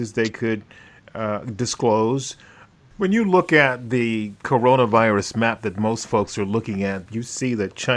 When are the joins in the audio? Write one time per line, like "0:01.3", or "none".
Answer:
0:02.9
0:07.1